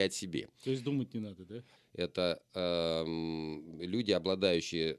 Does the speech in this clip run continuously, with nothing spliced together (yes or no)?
no